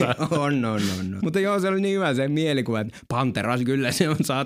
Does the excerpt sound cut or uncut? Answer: cut